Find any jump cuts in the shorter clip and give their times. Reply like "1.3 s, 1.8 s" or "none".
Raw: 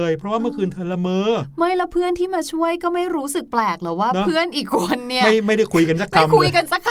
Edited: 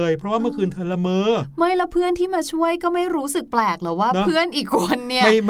none